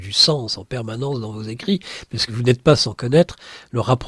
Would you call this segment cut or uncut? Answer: cut